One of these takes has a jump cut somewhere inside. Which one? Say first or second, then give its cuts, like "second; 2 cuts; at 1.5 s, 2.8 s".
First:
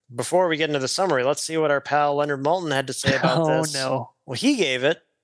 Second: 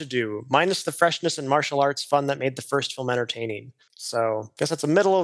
second; 1 cut; at 3.9 s